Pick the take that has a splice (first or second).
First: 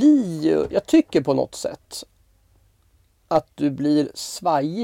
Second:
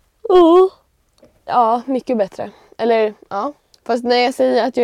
second